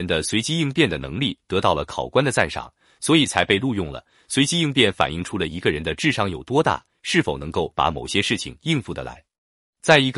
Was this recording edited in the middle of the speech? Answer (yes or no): no